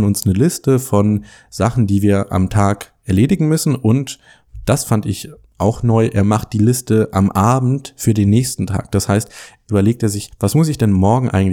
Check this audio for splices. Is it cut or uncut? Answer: cut